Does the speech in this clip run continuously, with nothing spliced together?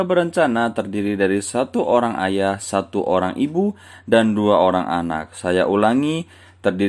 yes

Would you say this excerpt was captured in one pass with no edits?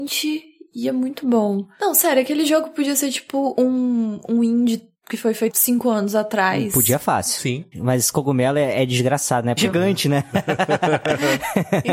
no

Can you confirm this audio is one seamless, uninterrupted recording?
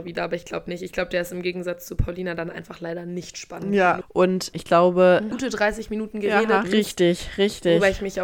no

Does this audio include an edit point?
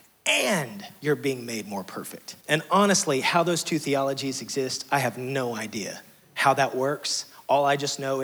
yes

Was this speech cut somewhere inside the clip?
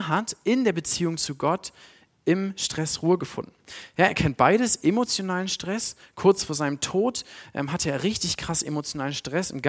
no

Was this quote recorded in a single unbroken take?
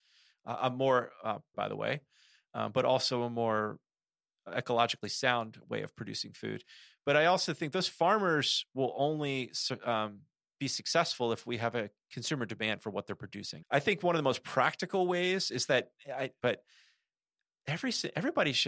no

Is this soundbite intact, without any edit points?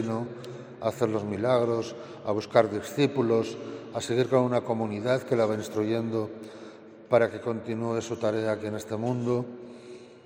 yes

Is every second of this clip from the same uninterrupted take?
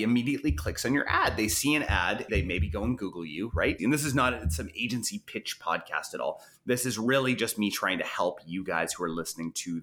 no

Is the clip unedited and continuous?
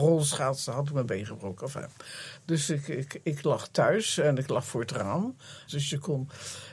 no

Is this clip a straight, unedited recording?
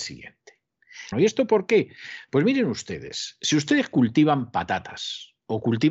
no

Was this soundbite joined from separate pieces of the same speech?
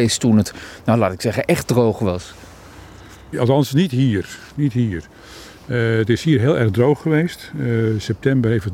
yes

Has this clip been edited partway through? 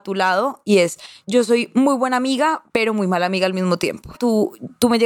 yes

